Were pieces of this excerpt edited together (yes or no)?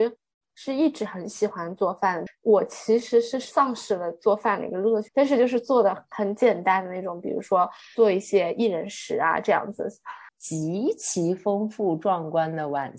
yes